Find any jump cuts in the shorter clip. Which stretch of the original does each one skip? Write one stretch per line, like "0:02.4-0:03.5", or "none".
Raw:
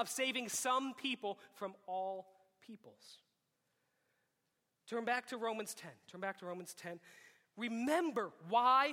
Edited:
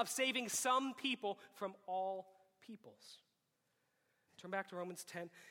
0:04.3-0:06.0

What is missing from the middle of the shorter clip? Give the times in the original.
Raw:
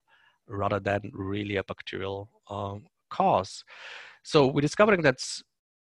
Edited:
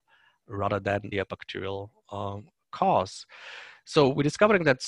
0:01.1-0:01.5

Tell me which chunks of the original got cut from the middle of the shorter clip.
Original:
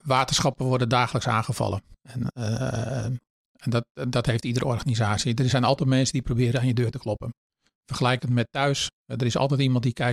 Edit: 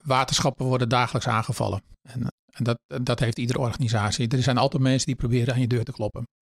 0:02.3-0:03.4

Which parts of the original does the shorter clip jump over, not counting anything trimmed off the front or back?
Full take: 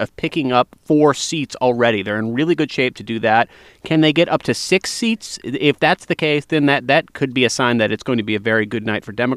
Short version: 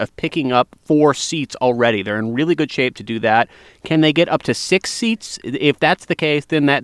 none

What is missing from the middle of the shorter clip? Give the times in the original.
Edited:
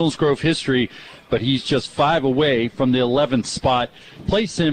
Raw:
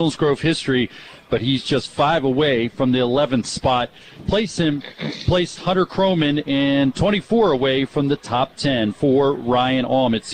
none

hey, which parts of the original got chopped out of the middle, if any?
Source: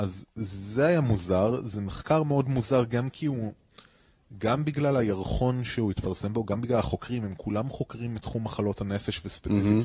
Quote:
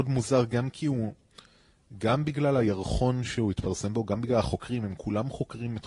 none

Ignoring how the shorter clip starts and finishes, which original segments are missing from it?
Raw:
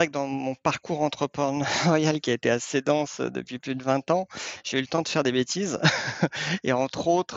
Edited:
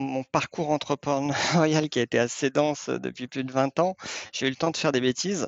none

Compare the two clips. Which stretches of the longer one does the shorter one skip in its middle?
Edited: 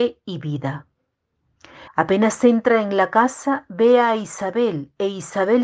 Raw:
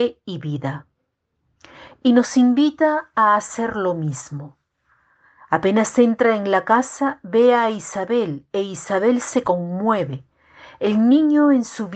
0:01.9-0:05.4

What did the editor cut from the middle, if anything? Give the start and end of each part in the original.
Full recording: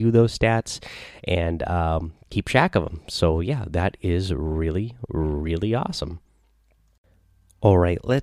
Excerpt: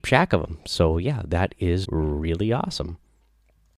0:04.3-0:05.1

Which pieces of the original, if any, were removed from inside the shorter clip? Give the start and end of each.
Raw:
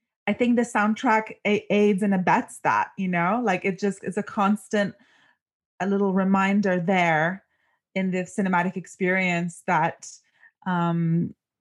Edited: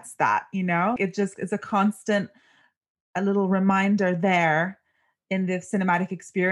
0:03.4-0:03.6

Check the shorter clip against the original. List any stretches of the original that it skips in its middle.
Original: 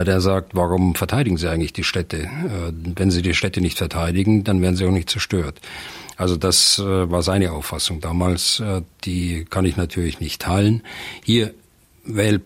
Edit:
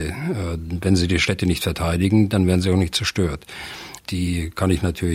0:06.1-0:08.9

